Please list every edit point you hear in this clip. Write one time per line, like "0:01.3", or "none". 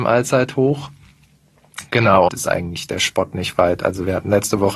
0:02.3